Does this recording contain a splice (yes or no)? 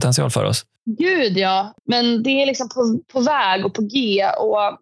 yes